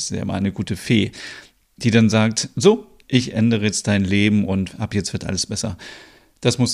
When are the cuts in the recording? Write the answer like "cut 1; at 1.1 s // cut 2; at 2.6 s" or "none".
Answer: cut 1; at 1.8 s // cut 2; at 3.0 s